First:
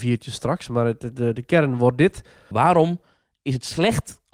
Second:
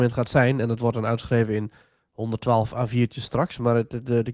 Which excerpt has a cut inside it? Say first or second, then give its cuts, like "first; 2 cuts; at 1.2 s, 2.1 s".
first; 1 cut; at 2.5 s